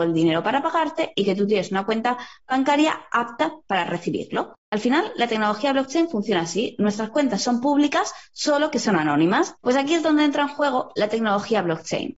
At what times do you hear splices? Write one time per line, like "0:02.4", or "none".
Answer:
0:09.6

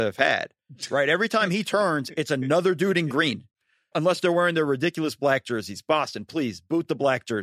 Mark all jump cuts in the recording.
0:03.9

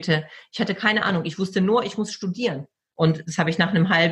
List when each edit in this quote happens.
0:02.9

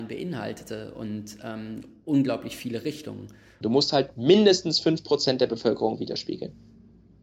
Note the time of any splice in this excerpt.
0:03.6

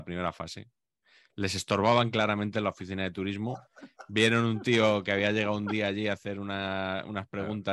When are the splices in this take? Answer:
none

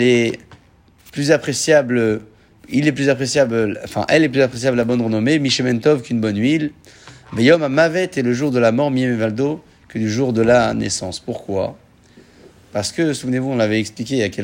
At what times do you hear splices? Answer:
none

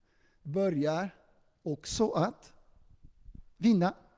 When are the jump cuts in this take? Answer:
none

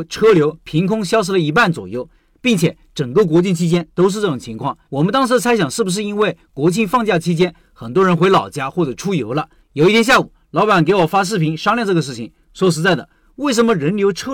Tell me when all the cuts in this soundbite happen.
0:04.8
0:09.6

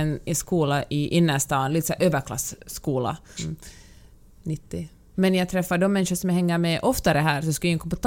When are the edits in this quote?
0:03.4
0:05.1

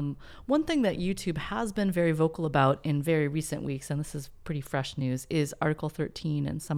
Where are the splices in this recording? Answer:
none

